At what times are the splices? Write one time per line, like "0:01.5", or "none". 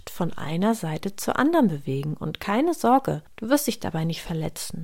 none